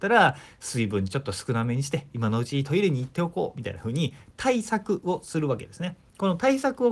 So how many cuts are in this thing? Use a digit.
0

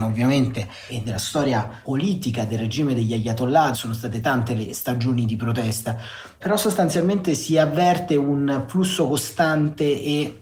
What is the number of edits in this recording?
1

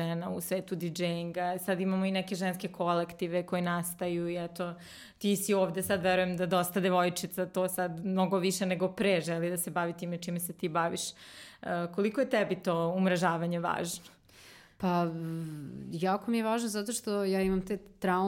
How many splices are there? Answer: 0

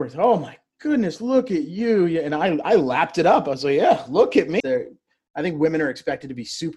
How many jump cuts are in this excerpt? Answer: 1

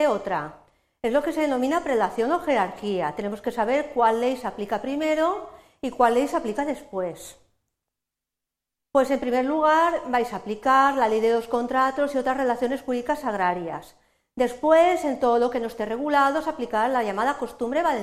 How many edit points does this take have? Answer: 0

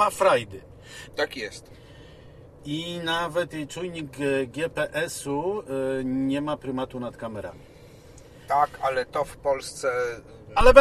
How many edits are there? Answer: 3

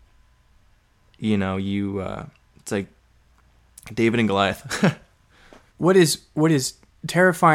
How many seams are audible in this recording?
1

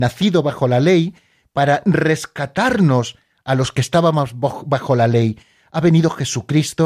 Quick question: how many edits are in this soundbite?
0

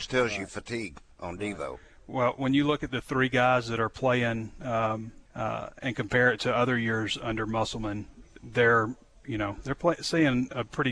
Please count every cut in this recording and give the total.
2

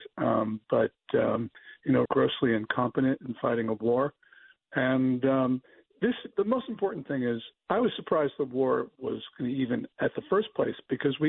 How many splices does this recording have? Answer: 2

